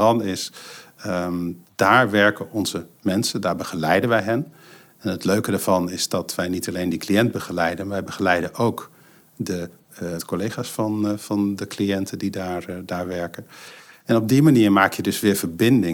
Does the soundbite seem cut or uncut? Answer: cut